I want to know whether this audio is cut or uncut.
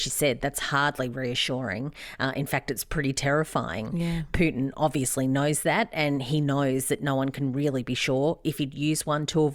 uncut